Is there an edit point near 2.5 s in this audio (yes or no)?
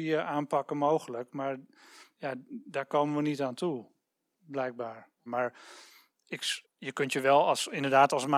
no